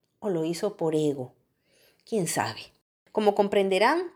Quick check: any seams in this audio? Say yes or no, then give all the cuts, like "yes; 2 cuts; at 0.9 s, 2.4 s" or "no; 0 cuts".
no; 0 cuts